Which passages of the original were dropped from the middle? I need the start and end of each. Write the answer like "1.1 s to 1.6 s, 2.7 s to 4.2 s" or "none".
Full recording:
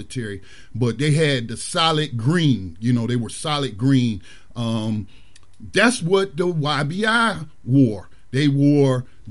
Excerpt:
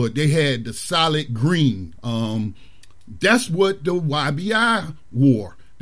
2.8 s to 4.5 s